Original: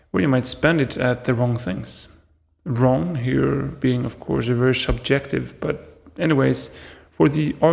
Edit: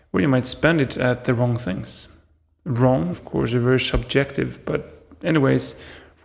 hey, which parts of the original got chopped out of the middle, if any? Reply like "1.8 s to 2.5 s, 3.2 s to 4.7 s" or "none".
3.1 s to 4.1 s